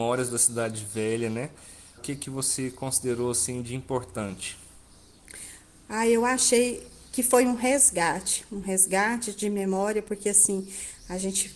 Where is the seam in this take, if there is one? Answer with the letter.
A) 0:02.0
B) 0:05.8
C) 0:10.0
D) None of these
A